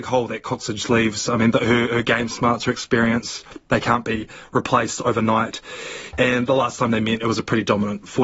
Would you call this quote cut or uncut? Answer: cut